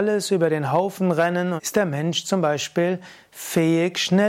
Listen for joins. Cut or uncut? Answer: cut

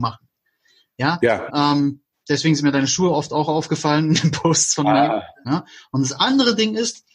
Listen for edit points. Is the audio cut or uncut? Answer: cut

